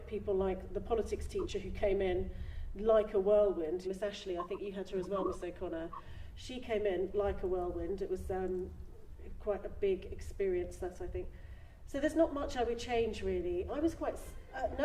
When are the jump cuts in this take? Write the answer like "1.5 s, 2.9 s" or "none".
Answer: 3.8 s, 13.7 s